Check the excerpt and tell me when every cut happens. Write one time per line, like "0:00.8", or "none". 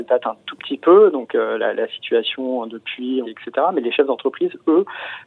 0:03.2